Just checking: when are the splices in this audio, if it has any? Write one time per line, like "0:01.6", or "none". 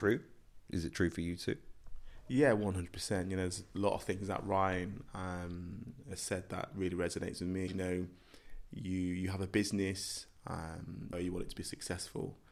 0:07.7
0:11.1